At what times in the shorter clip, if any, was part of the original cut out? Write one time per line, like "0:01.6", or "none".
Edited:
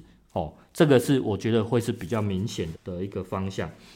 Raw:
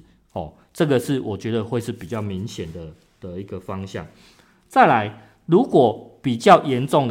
0:02.7